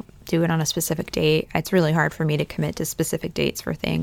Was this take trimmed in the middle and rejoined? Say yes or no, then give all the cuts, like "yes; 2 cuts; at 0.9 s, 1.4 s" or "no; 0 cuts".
no; 0 cuts